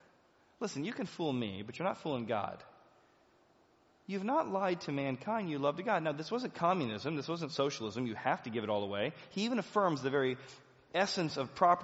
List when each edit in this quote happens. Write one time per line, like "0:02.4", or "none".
none